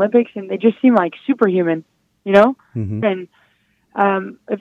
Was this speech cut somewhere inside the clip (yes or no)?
yes